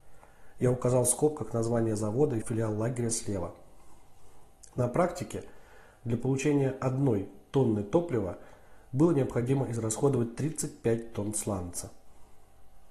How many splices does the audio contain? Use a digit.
2